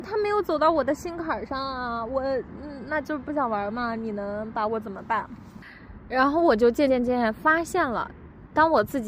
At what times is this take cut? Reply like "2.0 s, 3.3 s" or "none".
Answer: 6.9 s